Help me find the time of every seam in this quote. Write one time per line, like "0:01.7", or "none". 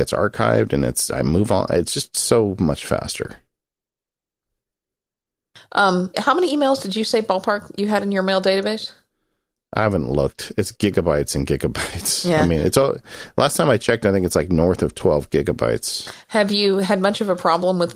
0:06.1